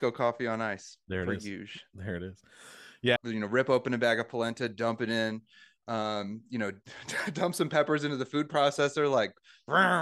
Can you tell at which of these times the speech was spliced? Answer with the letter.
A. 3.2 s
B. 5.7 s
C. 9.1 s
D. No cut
A